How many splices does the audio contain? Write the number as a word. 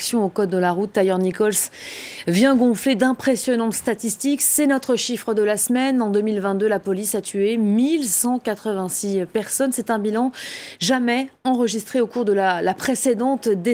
zero